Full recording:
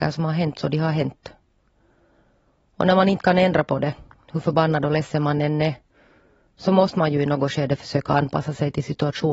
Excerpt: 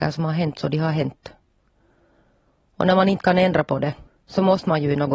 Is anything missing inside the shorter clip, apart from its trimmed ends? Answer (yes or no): yes